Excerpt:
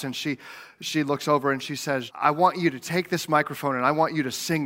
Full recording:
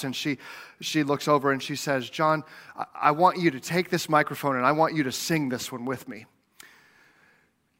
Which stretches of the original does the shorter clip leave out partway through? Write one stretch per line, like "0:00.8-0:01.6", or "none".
0:02.1-0:02.9

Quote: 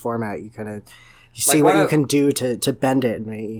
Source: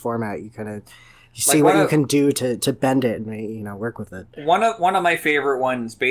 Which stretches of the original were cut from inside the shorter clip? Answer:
none

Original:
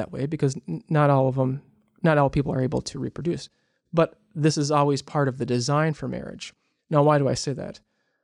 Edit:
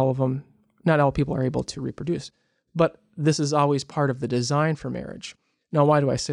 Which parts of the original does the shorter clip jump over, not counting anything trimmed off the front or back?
none

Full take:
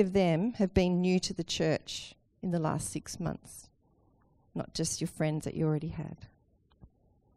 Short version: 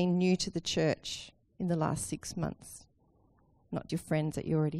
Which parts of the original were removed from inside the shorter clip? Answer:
0:04.7-0:05.0

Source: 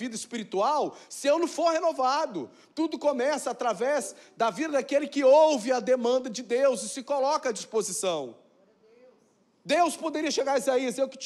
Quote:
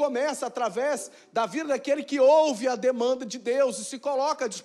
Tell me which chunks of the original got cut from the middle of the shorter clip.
none

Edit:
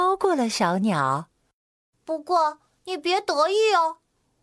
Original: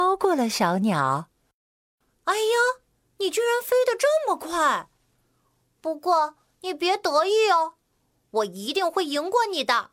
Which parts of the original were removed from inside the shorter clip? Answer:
0:01.9-0:05.7

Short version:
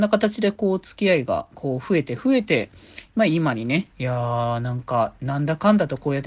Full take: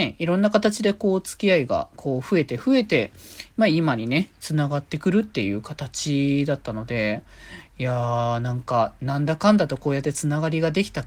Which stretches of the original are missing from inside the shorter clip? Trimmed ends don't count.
0:04.3-0:07.7

